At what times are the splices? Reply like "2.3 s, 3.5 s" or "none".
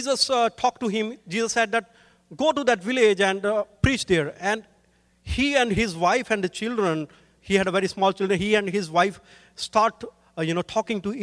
none